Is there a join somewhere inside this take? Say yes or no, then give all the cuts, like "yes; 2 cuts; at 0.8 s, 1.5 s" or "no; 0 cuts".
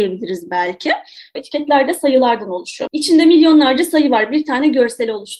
yes; 2 cuts; at 1.4 s, 2.9 s